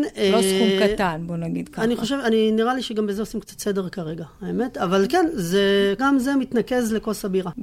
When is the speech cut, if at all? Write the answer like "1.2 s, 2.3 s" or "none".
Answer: 6.0 s